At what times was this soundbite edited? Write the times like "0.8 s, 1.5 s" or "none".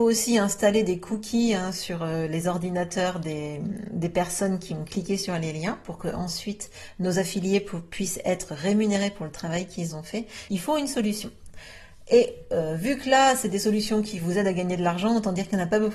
10.5 s